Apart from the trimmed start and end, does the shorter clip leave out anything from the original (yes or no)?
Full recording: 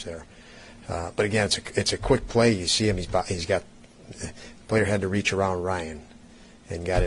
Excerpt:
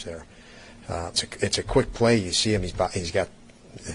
yes